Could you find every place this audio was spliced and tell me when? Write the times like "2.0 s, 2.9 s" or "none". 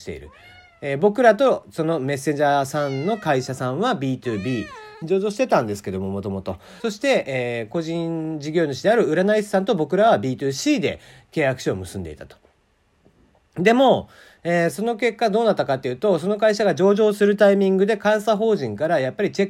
5.0 s, 6.8 s